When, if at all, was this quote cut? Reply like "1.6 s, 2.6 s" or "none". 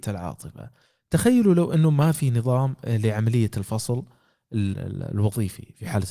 4.7 s